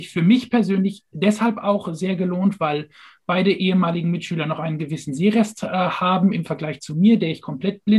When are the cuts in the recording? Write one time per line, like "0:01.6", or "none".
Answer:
none